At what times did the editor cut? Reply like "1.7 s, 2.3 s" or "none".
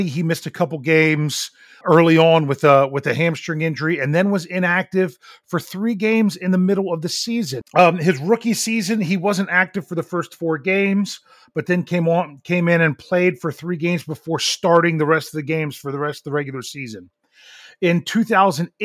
1.8 s, 7.6 s